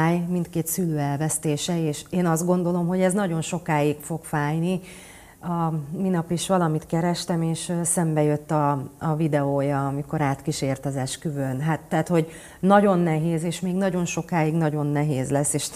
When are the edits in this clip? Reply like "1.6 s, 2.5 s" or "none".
none